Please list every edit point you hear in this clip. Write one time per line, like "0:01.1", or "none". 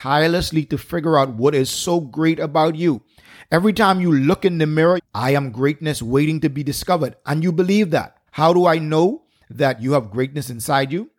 0:05.0
0:08.3